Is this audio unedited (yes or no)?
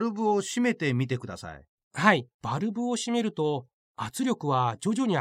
no